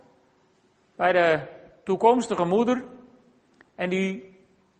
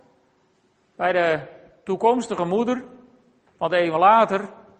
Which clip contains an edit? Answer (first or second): second